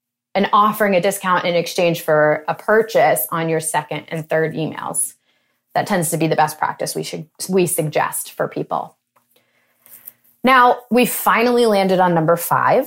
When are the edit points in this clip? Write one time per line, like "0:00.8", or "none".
none